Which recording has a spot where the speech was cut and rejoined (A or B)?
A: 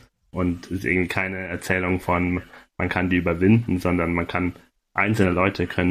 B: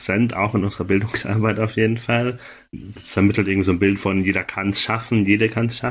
B